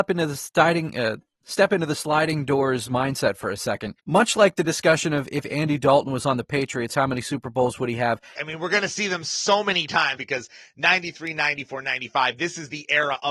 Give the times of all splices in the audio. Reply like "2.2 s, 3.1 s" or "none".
4.0 s, 8.4 s, 10.2 s